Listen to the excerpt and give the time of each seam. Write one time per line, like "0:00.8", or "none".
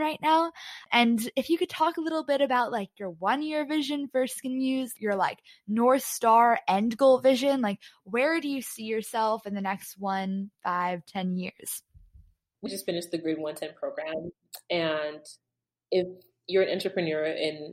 0:12.7